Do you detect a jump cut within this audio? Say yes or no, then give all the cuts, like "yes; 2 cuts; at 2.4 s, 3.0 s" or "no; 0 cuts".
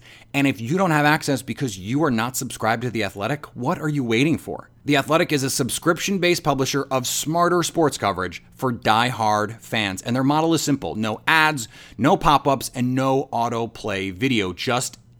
no; 0 cuts